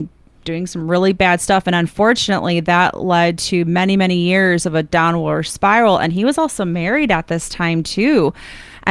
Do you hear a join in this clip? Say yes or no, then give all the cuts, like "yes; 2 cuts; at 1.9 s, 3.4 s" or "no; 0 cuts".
no; 0 cuts